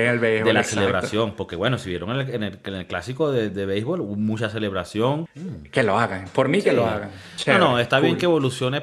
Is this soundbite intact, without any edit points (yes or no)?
no